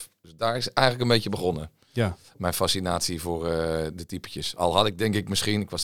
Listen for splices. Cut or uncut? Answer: uncut